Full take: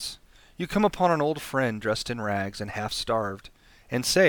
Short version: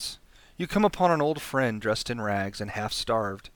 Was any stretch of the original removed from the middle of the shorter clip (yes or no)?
no